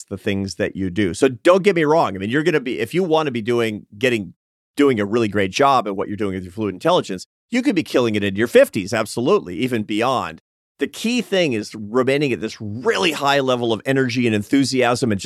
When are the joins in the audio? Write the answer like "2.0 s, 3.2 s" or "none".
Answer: none

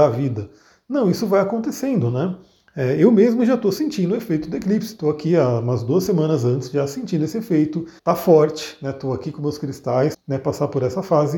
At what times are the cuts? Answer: 8.0 s, 10.1 s

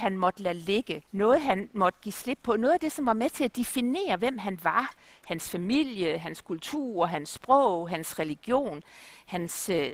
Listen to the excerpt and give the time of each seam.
1.1 s

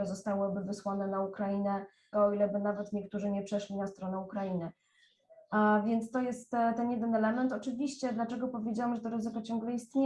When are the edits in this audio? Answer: 2.1 s

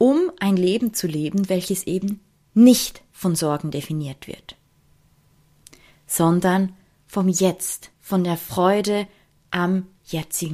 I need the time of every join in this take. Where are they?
7.9 s

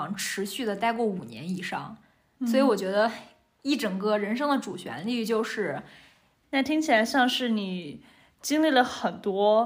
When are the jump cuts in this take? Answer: 6.4 s

